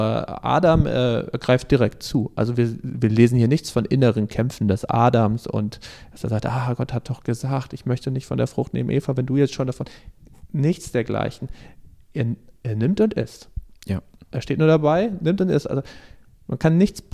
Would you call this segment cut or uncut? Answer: uncut